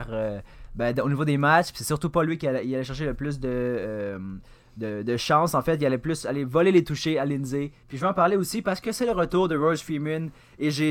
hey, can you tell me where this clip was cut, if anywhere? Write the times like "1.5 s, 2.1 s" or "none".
7.8 s